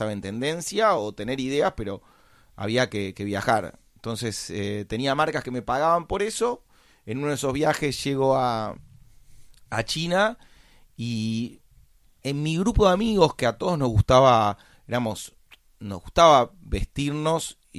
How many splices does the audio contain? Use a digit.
0